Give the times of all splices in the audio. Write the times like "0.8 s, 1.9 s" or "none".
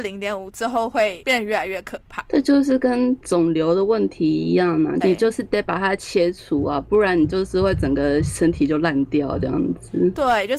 5.0 s

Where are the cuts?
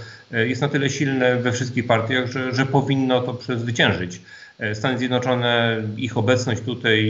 2.5 s

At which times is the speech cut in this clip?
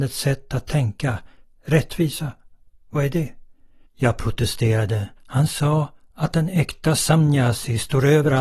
3.9 s, 5.2 s

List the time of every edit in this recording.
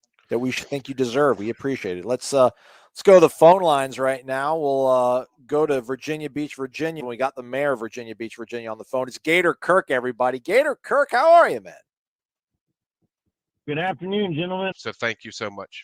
7.0 s, 14.7 s

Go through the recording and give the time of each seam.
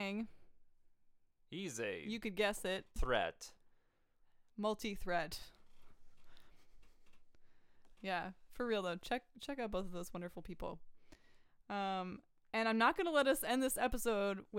3.0 s

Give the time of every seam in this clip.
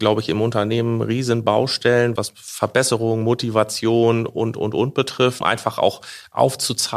2.2 s, 5.4 s

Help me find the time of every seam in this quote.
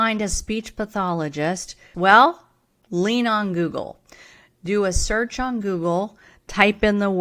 1.9 s

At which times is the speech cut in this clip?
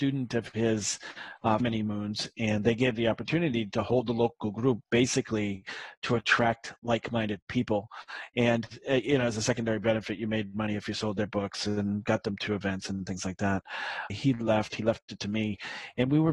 1.6 s, 14.1 s

